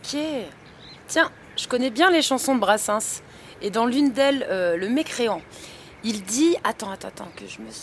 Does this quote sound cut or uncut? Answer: uncut